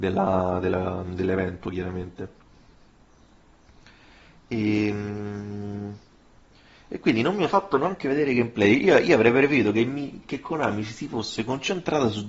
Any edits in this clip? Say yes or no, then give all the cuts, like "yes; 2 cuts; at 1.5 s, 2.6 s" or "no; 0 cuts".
no; 0 cuts